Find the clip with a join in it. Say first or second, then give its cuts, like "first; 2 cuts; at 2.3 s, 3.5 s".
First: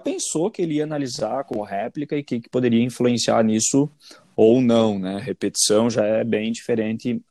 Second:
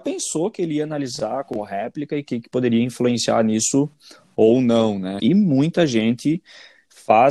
second; 1 cut; at 5.2 s